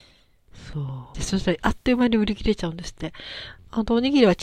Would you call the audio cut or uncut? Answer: cut